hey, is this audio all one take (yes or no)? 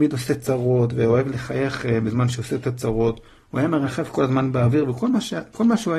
yes